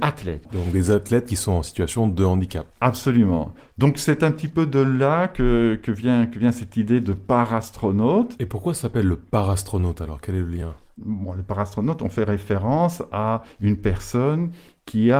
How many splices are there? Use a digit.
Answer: 1